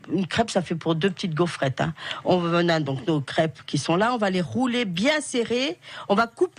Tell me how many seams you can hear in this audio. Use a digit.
0